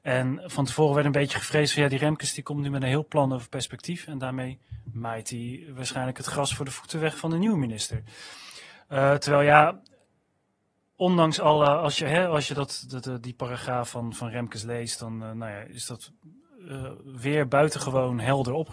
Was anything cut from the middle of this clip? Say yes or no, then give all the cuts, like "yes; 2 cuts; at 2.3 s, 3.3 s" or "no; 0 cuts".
no; 0 cuts